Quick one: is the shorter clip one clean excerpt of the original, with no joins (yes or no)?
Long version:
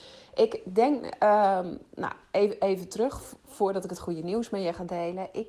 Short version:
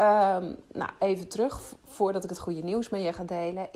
no